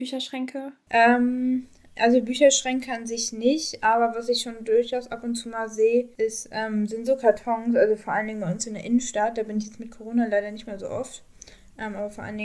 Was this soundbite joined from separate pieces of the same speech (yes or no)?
no